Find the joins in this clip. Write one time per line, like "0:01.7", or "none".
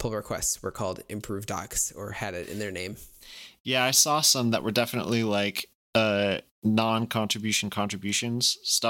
none